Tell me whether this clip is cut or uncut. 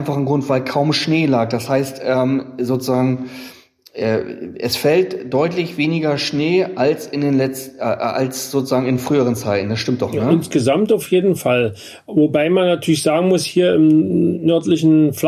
uncut